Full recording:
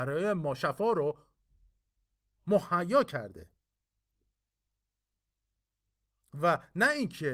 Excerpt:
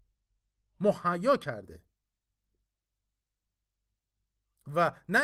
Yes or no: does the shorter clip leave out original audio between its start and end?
no